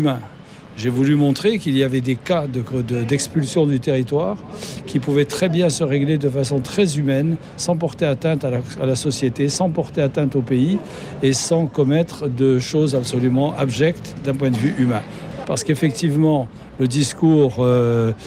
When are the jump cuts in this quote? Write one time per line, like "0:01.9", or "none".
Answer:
0:15.4